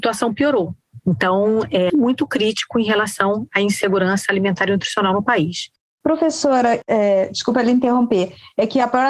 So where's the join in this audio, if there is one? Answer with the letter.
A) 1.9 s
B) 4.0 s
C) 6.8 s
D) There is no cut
A